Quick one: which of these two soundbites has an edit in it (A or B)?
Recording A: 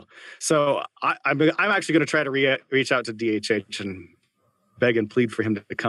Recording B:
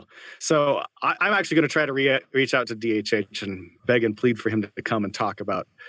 B